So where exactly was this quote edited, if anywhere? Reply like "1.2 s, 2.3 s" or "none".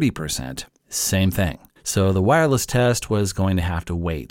1.8 s